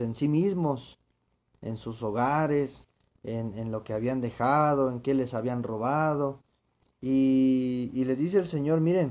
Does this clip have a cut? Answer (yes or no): no